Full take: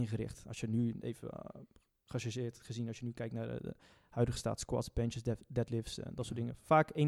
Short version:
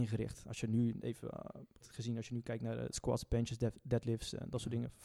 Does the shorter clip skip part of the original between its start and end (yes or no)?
yes